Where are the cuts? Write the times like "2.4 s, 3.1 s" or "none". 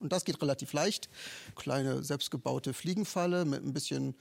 1.5 s